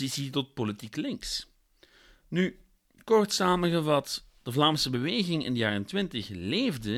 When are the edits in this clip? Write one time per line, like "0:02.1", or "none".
none